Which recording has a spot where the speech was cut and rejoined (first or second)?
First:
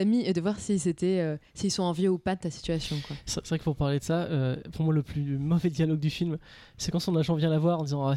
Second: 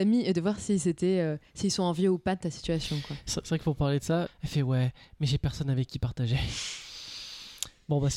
second